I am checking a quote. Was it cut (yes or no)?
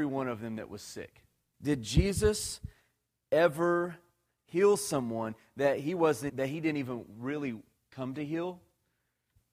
yes